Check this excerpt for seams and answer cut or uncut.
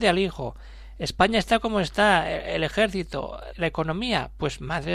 cut